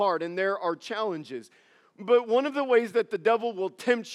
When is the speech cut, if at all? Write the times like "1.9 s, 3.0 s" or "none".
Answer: none